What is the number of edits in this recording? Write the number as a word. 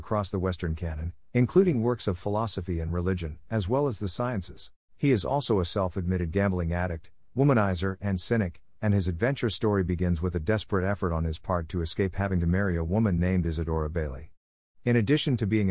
two